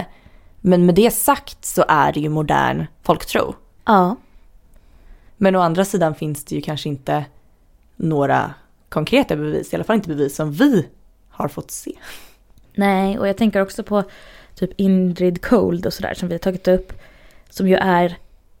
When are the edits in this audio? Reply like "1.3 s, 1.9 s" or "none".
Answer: 3.8 s, 5.3 s